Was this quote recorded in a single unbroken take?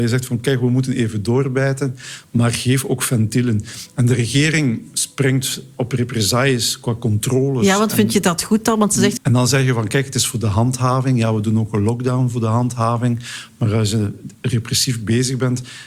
no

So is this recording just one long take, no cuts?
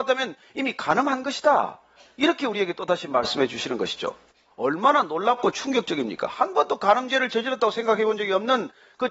yes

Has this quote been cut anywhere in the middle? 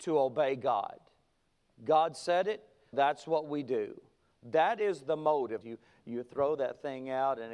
yes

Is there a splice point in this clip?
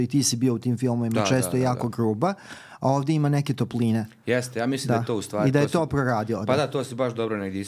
no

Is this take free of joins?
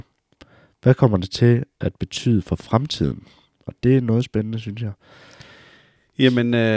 yes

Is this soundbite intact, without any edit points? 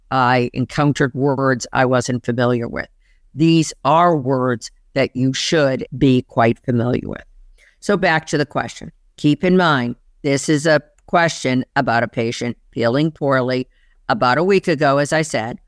no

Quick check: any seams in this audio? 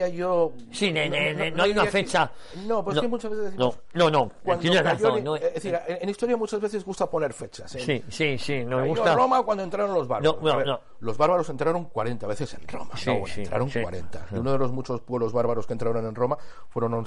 no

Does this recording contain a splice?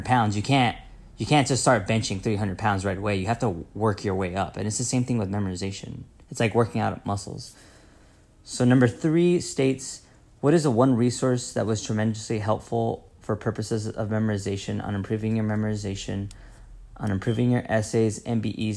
no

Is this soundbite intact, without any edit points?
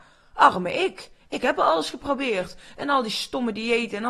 yes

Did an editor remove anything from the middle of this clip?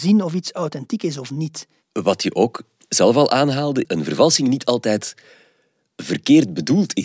yes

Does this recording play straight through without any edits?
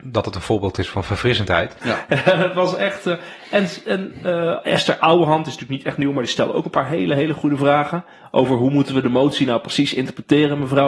no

